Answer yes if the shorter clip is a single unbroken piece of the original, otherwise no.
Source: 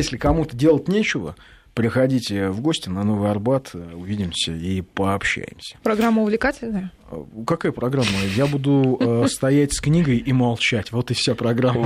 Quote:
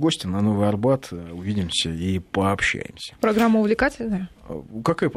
yes